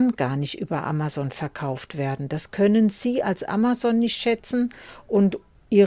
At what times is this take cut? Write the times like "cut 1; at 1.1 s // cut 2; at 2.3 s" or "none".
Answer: none